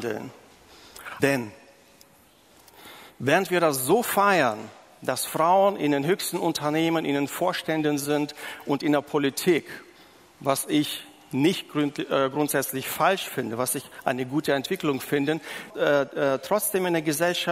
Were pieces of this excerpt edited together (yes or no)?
yes